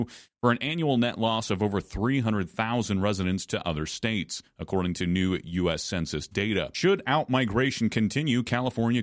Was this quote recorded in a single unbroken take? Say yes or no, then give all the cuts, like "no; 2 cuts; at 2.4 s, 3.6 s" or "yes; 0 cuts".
yes; 0 cuts